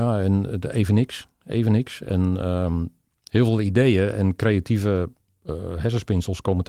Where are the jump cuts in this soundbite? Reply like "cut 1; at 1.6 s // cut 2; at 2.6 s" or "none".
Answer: none